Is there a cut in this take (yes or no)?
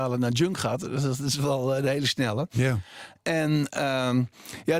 no